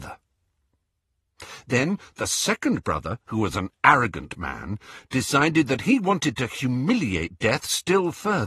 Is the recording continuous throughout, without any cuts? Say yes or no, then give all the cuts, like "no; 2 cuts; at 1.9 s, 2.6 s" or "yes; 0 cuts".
yes; 0 cuts